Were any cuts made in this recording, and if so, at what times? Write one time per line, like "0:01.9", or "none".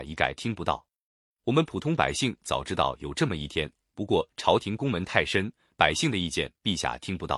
none